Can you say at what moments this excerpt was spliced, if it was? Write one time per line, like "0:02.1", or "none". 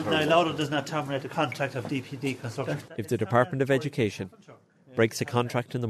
0:02.9